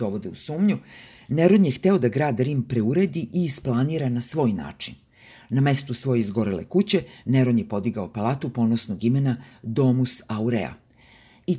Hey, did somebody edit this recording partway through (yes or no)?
no